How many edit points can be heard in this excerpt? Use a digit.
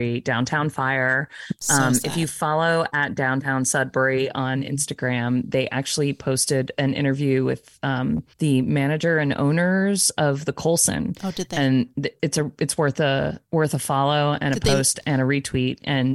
2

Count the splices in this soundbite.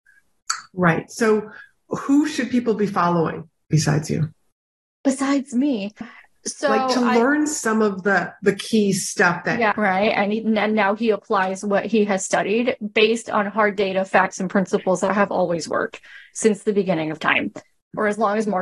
2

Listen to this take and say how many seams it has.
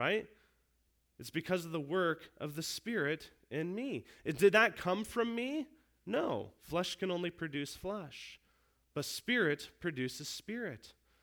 0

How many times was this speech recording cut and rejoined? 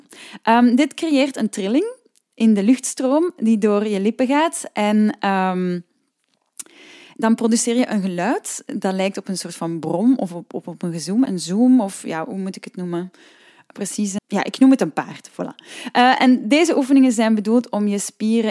2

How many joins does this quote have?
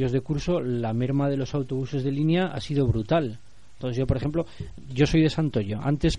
0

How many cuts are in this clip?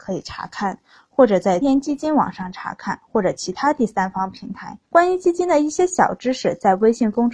2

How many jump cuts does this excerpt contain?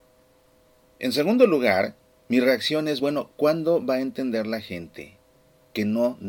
0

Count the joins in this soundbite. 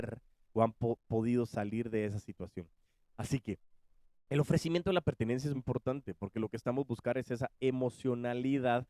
2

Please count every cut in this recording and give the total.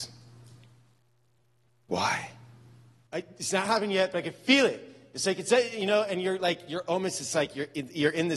1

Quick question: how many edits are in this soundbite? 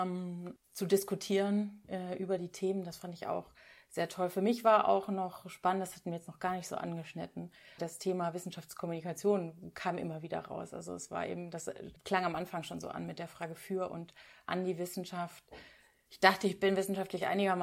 0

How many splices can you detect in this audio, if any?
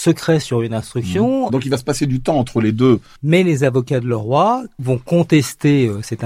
2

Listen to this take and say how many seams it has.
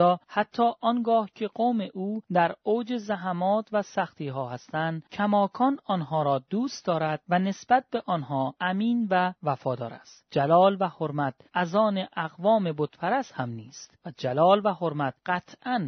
1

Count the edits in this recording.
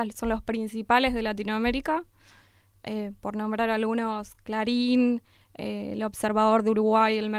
0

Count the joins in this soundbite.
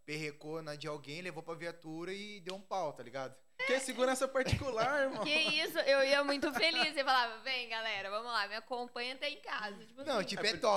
1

